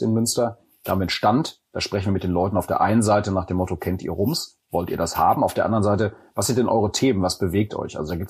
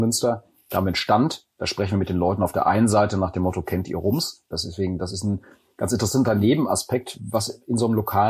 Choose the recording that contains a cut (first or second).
second